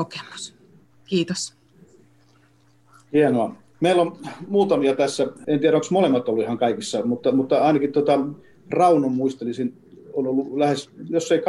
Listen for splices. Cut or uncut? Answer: cut